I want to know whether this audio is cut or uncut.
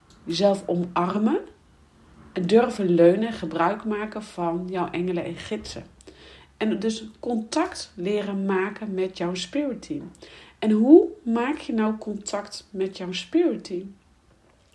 uncut